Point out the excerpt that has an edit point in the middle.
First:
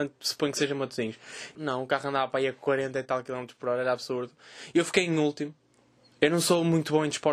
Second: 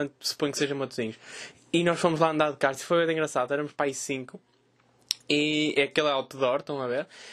first; 1 cut; at 1.5 s

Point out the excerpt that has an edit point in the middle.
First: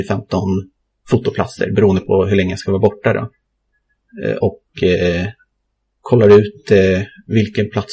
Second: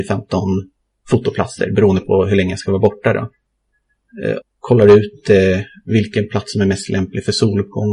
second; 1 cut; at 4.4 s

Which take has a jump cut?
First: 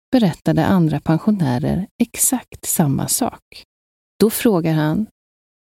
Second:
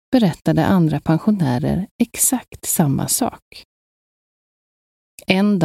first; 1 cut; at 4.0 s

